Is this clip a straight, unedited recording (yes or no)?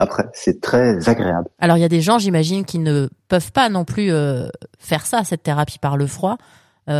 yes